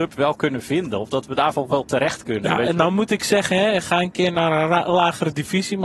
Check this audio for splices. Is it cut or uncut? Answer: uncut